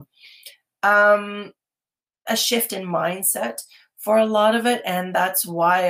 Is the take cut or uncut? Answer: cut